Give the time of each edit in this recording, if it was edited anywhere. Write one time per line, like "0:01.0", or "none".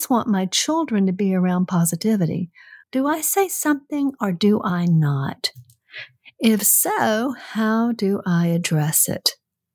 0:02.8